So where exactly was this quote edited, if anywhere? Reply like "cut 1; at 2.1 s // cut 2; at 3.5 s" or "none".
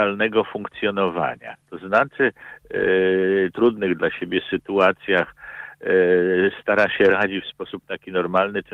cut 1; at 1.6 s // cut 2; at 3.5 s